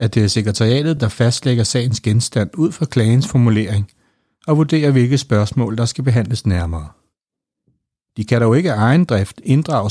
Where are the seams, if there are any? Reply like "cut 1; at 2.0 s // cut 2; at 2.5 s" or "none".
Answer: none